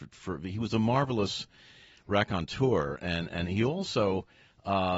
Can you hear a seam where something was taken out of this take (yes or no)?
no